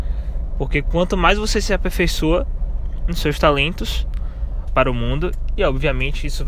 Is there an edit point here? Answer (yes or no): yes